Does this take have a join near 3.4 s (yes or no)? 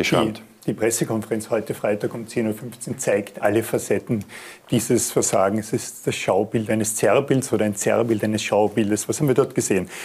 yes